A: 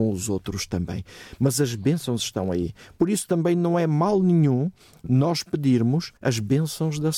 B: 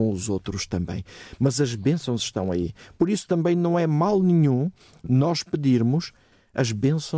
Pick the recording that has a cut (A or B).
A